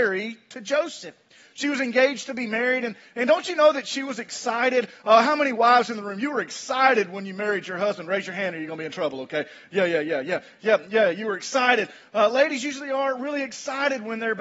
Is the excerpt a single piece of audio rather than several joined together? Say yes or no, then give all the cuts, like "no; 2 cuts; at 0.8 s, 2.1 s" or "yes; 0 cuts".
yes; 0 cuts